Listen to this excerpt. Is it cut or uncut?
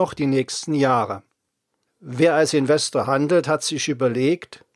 cut